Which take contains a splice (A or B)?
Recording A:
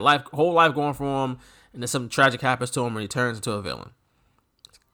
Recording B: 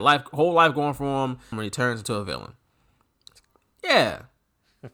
B